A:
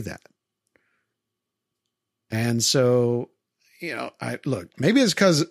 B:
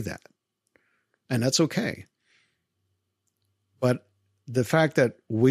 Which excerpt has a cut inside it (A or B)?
B